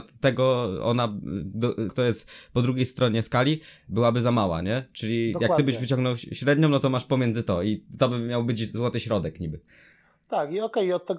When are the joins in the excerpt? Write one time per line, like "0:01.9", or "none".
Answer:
0:01.9